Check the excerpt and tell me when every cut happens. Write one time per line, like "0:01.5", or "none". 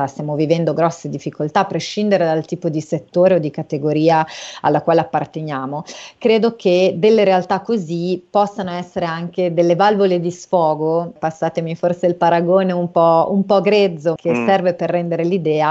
0:11.2
0:14.2